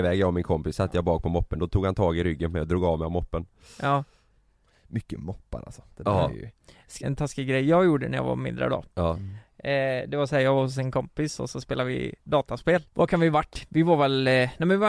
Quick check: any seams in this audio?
yes; 2 cuts; at 7.0 s, 12.9 s

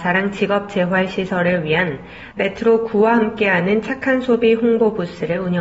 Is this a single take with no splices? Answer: yes; 0 cuts

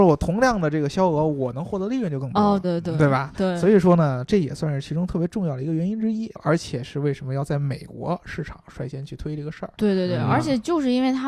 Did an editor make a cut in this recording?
yes; 2 cuts; at 2.6 s, 6.4 s

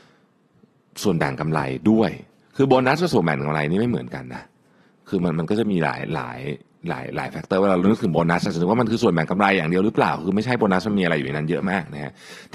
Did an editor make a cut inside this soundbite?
no; 0 cuts

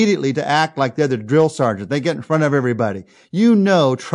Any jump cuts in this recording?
no; 0 cuts

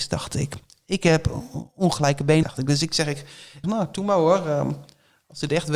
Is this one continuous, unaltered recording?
no; 2 cuts; at 2.4 s, 3.6 s

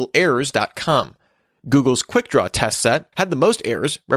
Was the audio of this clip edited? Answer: yes; 1 cut; at 3.1 s

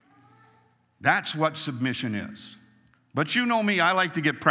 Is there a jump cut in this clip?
yes; 1 cut; at 2.9 s

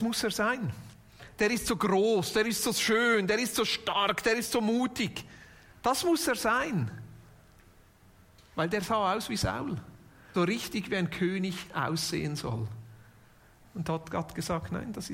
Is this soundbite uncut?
no; 1 cut; at 10.3 s

